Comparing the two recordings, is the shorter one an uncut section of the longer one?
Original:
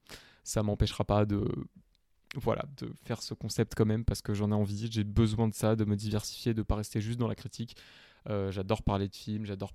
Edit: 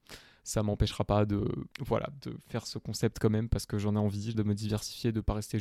no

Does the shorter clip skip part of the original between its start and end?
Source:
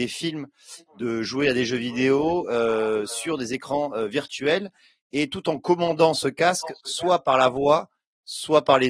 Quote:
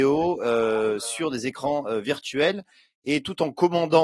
no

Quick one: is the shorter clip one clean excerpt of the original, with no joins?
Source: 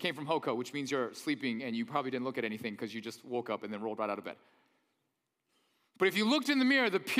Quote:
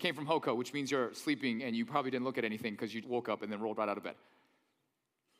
no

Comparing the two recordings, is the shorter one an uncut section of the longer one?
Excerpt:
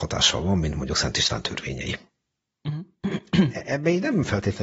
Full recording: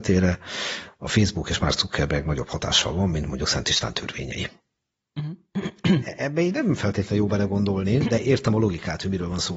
yes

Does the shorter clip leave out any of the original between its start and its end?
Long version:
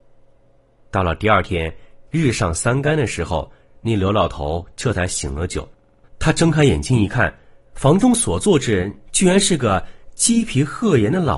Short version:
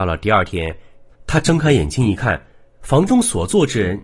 yes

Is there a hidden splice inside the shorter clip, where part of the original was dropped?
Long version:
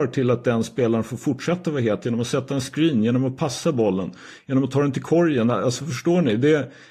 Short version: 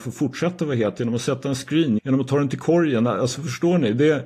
yes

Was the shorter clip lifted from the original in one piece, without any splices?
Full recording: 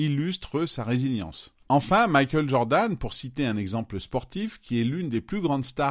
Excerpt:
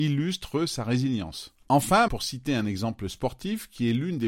no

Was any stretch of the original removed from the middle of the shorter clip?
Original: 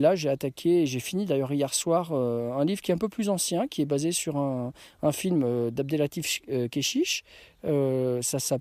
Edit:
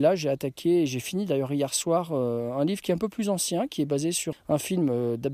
yes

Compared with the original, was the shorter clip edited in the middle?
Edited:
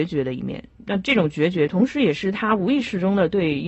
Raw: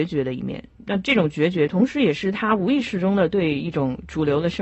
no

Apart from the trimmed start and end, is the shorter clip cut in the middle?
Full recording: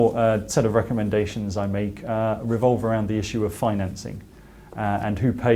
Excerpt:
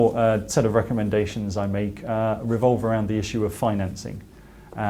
no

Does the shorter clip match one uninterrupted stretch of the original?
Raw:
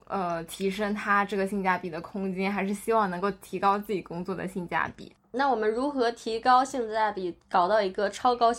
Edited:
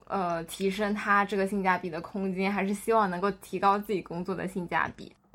yes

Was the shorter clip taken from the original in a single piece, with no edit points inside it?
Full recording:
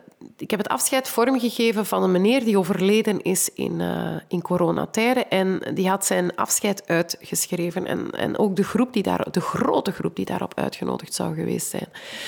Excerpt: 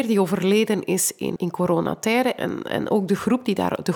no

